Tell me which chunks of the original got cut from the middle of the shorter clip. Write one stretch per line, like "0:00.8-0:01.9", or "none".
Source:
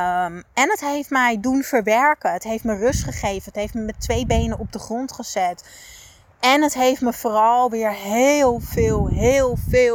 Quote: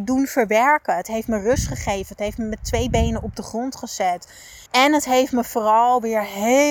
0:06.0-0:06.3

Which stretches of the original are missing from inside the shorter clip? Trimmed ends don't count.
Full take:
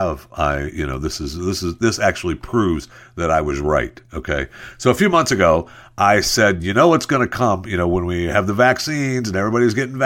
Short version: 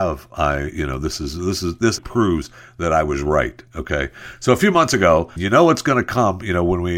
0:02.0-0:02.4
0:05.7-0:06.6

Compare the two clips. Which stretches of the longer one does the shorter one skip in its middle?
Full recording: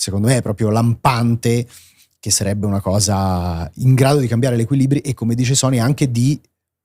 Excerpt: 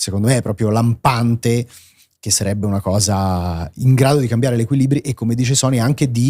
none

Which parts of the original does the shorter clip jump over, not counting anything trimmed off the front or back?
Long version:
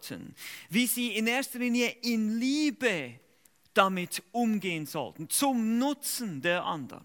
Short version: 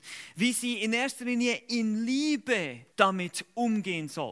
0:03.3-0:03.7

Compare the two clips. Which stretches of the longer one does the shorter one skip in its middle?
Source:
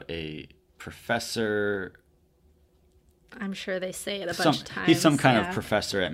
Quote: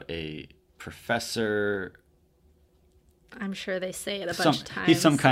none

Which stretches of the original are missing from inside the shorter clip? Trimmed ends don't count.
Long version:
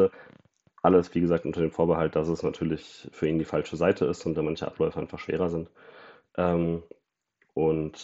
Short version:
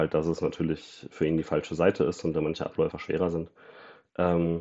0:04.9-0:05.1

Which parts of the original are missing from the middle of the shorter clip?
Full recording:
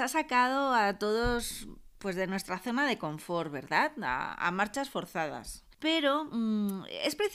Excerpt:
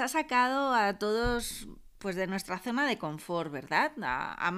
none

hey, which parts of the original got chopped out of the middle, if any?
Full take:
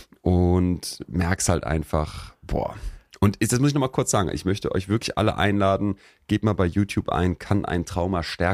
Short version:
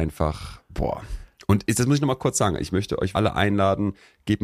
0:04.9-0:05.1

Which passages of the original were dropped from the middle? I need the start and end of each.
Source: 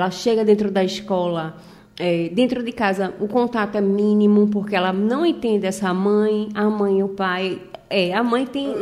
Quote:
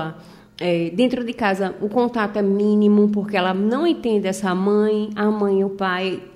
none

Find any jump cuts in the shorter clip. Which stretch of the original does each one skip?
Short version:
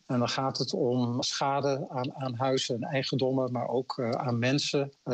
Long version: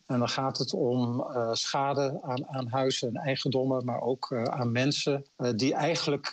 0:01.2-0:01.5

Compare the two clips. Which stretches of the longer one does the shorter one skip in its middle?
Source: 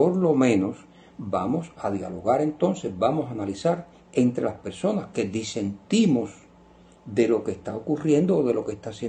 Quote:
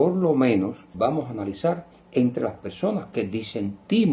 0:00.9-0:03.0

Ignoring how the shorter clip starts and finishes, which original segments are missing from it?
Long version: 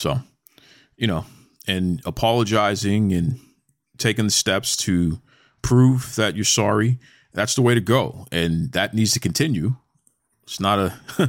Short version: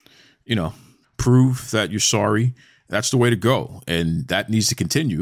0:01.5-0:05.5

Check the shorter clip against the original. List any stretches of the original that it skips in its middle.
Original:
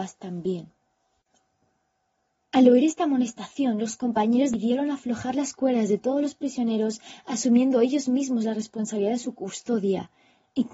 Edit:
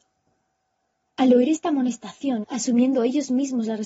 0:03.8-0:07.2

